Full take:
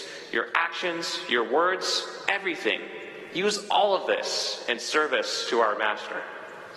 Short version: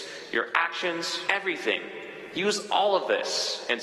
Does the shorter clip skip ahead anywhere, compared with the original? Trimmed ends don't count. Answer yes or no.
yes